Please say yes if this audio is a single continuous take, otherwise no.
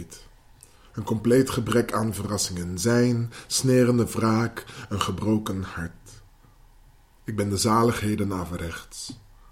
yes